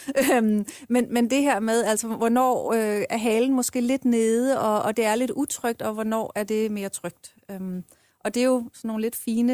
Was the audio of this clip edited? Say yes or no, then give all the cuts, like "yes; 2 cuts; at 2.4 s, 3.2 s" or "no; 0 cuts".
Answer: no; 0 cuts